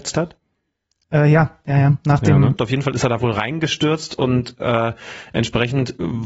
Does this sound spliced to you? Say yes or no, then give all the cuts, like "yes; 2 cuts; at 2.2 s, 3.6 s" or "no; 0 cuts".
yes; 1 cut; at 2.6 s